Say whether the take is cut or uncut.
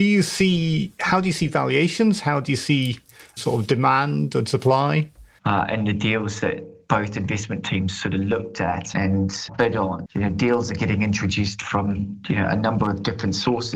cut